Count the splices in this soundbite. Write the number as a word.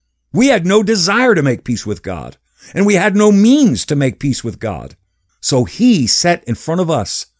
one